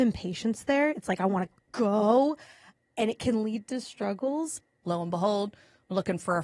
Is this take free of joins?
no; 1 cut; at 4.8 s

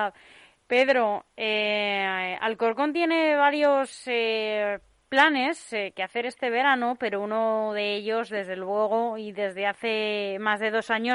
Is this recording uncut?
yes; 0 cuts

